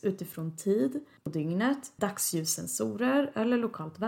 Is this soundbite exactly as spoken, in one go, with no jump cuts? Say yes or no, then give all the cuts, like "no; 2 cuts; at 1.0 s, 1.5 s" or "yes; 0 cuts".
no; 1 cut; at 2.0 s